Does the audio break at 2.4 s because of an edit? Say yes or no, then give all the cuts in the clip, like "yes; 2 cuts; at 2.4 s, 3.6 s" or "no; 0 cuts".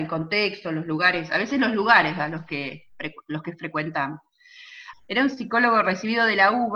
no; 1 cut; at 4.9 s